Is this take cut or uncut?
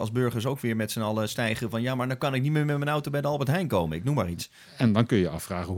uncut